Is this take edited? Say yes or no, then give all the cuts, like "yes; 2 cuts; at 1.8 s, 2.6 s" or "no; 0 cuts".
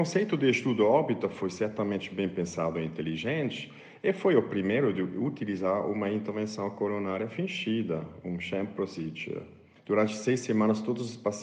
yes; 1 cut; at 9.8 s